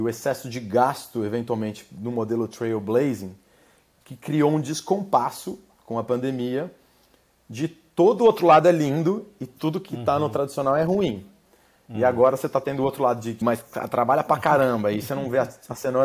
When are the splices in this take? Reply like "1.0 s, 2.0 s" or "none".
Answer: 13.4 s